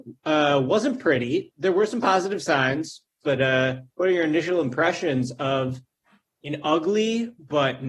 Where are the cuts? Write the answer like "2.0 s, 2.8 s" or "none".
3.2 s